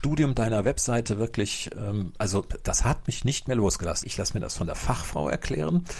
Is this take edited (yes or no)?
yes